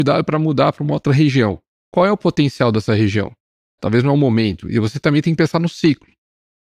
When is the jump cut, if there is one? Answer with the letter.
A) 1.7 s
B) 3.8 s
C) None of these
B